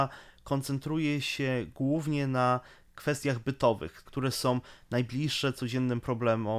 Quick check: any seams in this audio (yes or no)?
yes